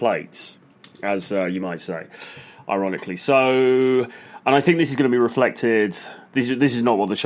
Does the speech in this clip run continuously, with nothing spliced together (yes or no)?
yes